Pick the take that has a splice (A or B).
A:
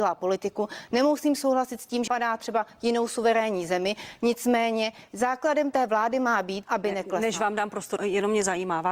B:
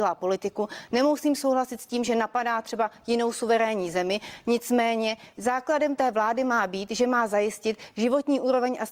A